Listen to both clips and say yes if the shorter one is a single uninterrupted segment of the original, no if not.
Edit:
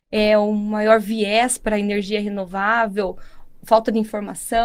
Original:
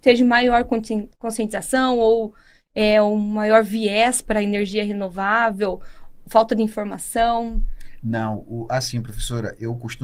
yes